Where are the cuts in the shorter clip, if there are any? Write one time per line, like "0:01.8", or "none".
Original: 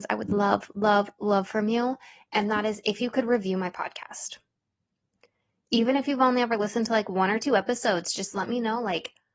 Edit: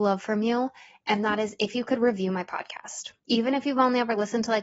0:03.2

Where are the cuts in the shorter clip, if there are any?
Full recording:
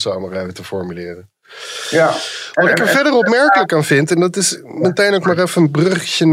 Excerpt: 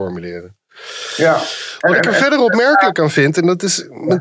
none

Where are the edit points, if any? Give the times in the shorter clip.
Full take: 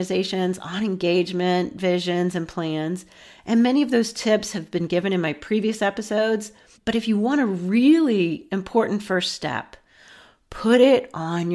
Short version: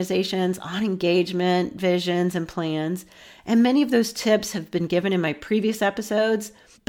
none

